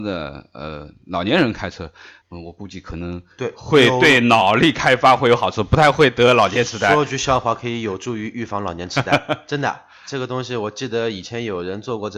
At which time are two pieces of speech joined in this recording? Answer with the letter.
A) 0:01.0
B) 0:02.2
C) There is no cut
B